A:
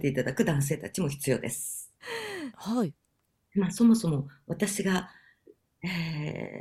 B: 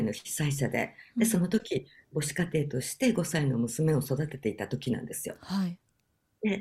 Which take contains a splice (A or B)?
A